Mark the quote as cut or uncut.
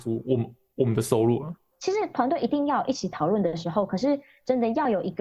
cut